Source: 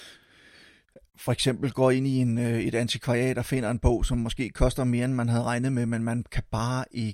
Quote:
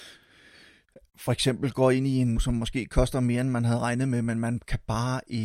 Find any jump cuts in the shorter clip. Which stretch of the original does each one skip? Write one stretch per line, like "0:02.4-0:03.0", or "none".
0:02.4-0:04.0